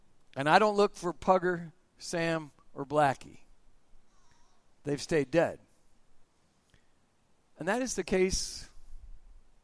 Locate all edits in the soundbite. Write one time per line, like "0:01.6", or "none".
none